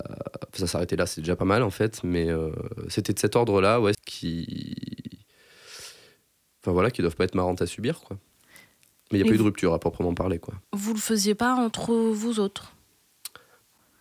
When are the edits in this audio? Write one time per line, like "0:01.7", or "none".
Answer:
0:03.9
0:10.6